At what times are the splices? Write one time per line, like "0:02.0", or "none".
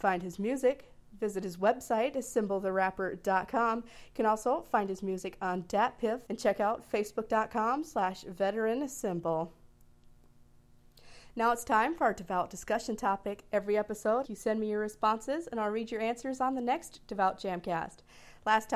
0:06.3
0:14.2

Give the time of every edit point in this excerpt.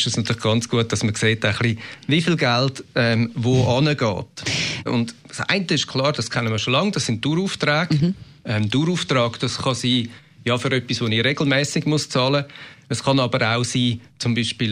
0:04.9

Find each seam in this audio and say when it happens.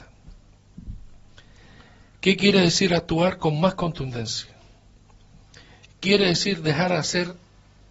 none

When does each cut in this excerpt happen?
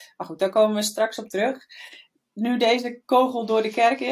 none

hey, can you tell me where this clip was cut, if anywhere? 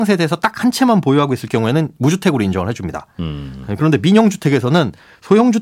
none

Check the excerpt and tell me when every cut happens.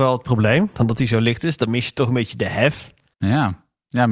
0:03.1

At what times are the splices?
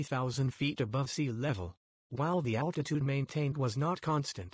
0:02.0

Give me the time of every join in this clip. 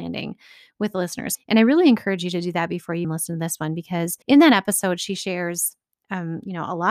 0:01.3
0:03.0
0:04.2

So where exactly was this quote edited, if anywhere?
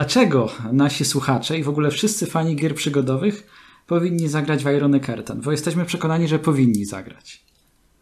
none

